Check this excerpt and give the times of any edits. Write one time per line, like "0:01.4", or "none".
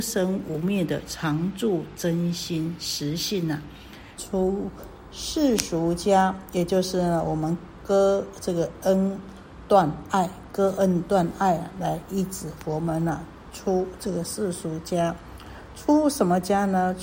0:04.2